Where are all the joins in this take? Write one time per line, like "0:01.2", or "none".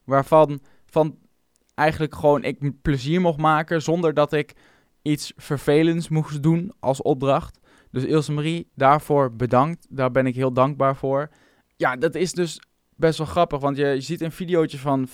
0:11.6